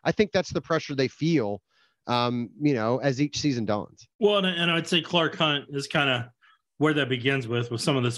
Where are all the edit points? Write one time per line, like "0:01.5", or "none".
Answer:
0:04.1